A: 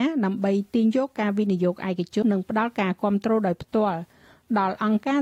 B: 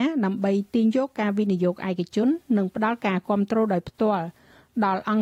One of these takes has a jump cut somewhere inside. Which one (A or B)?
A